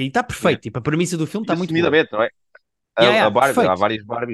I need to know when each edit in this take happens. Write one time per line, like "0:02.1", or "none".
none